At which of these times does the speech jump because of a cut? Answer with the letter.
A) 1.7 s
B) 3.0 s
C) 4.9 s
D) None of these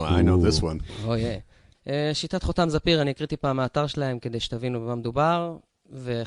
A